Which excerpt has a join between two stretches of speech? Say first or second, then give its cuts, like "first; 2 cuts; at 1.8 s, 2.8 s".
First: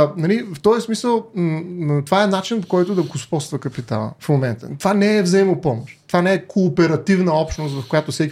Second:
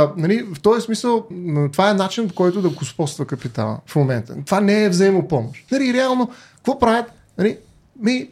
second; 2 cuts; at 1.3 s, 5.7 s